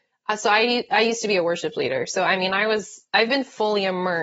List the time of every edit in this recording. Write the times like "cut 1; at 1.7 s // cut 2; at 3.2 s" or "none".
cut 1; at 3.1 s